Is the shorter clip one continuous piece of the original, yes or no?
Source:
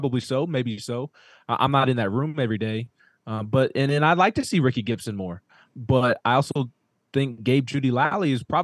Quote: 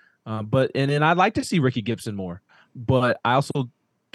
yes